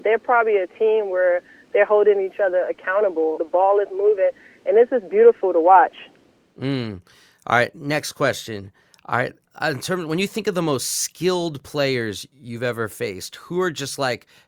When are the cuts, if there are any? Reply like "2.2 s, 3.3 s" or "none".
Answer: 3.4 s